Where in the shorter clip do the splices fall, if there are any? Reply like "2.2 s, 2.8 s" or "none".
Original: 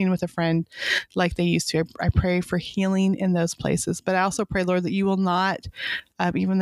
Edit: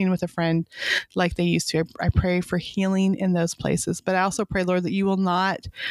none